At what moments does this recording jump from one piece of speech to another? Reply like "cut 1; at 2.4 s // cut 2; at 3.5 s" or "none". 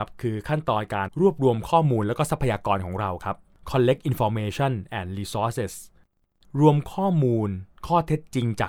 cut 1; at 1.1 s